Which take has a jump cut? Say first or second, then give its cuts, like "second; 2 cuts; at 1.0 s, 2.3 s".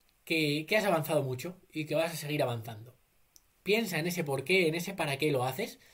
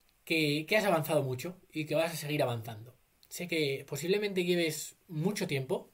second; 1 cut; at 3.1 s